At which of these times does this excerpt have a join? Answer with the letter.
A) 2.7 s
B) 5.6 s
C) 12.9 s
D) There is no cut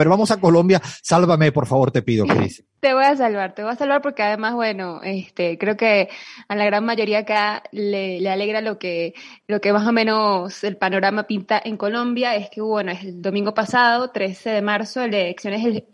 D